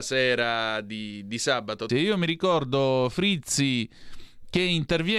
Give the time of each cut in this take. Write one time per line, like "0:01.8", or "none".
0:01.9